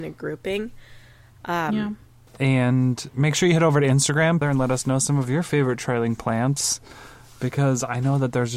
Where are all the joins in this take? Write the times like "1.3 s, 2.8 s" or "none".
2.3 s, 4.4 s